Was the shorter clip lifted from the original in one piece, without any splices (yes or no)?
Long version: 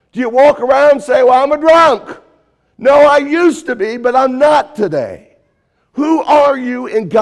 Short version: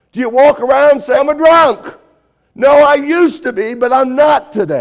no